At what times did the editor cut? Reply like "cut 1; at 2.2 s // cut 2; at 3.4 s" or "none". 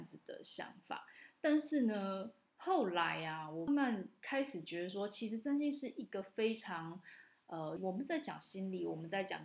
cut 1; at 3.7 s // cut 2; at 7.8 s